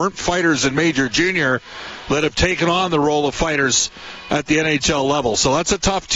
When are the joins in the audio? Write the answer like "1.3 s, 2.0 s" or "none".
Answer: none